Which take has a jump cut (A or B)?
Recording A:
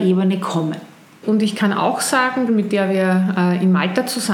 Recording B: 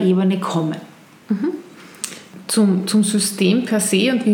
A